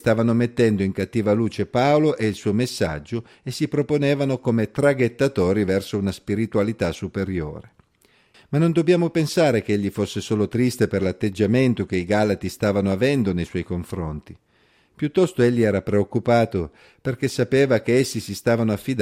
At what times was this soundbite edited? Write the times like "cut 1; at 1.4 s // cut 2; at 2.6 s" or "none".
cut 1; at 8.3 s